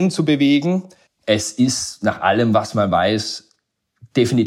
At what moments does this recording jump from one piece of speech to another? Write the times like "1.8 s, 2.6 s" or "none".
1.1 s